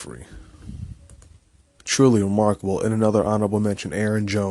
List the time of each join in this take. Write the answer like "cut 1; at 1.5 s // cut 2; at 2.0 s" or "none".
cut 1; at 1.8 s